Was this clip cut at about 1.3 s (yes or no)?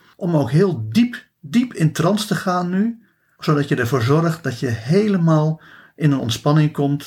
no